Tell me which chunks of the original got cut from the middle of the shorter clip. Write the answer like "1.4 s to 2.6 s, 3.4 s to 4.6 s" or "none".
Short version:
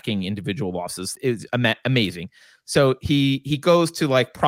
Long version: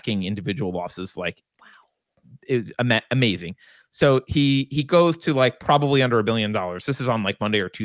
1.1 s to 2.4 s